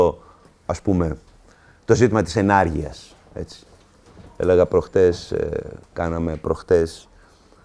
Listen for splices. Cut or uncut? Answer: uncut